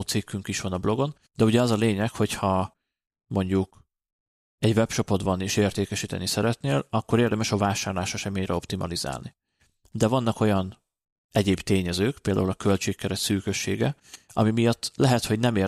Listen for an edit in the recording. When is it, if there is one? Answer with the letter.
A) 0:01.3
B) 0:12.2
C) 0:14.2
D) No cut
A